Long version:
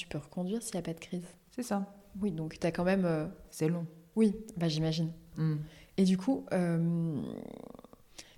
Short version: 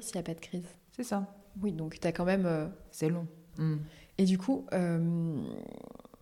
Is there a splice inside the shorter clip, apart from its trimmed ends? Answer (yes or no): yes